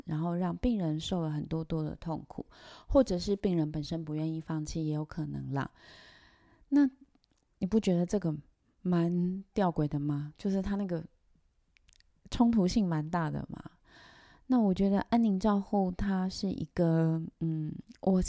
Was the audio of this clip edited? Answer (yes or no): no